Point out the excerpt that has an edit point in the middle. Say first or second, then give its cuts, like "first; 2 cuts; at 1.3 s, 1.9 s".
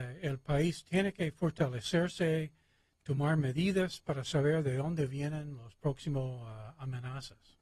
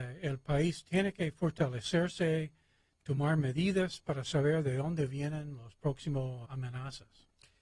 second; 1 cut; at 6.4 s